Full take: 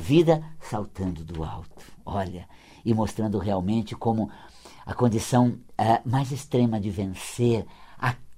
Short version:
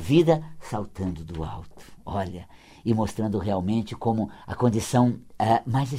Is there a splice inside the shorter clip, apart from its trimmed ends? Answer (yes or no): yes